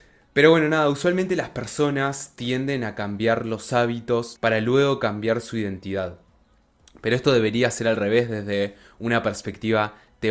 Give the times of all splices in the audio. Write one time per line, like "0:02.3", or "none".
0:04.4